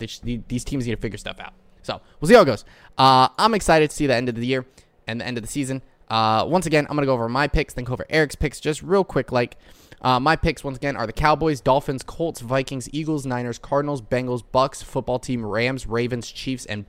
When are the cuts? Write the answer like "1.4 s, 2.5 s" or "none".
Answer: none